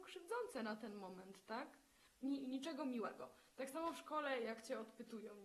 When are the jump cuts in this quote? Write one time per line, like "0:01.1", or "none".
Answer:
0:02.1